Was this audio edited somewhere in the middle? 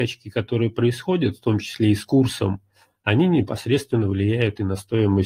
no; 0 cuts

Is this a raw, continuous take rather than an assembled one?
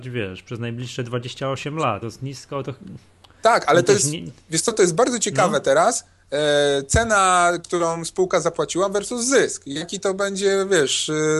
no; 1 cut; at 2.0 s

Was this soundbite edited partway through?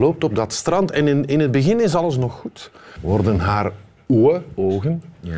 yes; 1 cut; at 3.0 s

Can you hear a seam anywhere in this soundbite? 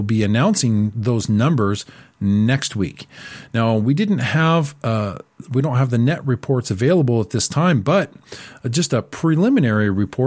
no; 0 cuts

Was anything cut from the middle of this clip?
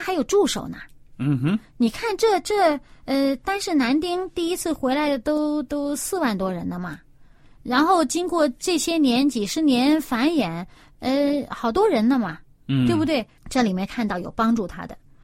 yes; 1 cut; at 13.4 s

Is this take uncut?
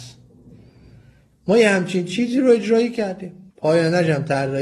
no; 1 cut; at 3.5 s

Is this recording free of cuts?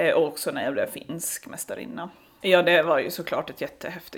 no; 1 cut; at 2.4 s

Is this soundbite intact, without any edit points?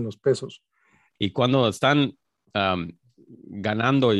no; 1 cut; at 1.2 s

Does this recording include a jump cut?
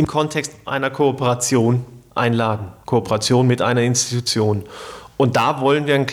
no; 0 cuts

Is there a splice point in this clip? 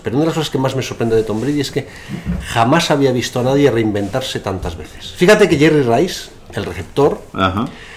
no; 0 cuts

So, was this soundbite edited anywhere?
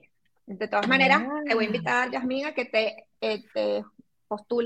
no; 0 cuts

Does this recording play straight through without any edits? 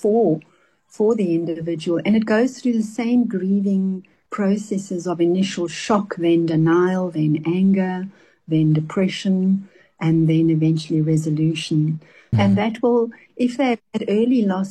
no; 1 cut; at 12.3 s

